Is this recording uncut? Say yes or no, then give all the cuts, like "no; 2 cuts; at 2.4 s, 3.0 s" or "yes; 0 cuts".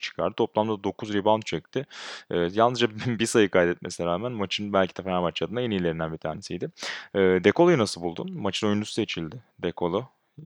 yes; 0 cuts